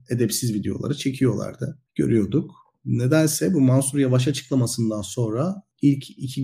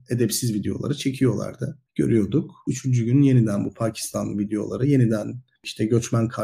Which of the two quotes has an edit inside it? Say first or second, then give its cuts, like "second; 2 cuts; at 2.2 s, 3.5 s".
second; 1 cut; at 2.7 s